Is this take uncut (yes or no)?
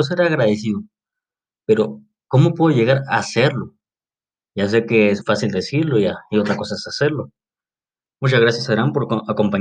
no